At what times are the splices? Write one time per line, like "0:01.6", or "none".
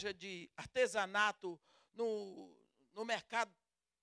none